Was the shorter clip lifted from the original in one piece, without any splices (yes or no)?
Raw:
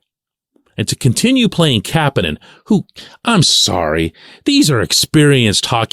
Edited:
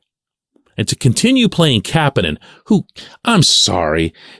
yes